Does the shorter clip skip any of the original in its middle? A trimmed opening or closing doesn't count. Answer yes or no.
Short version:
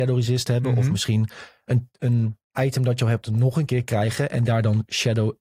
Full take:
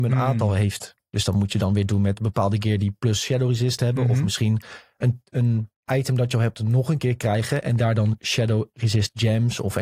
no